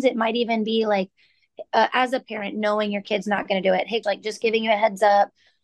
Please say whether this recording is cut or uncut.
cut